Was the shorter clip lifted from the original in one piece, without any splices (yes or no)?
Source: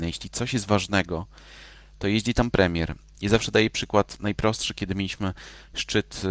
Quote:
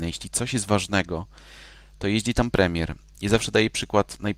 yes